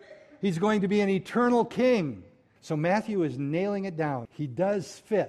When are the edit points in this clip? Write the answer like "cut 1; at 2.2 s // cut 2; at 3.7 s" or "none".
cut 1; at 2.6 s // cut 2; at 4.3 s

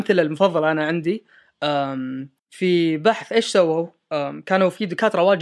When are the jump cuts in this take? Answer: cut 1; at 2.4 s

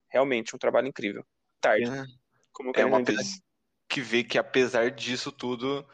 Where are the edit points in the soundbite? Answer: cut 1; at 1.6 s

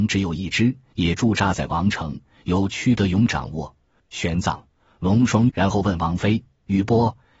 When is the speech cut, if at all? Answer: cut 1; at 4.0 s // cut 2; at 5.5 s

